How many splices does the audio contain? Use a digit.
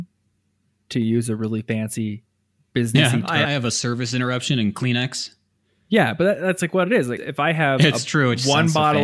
2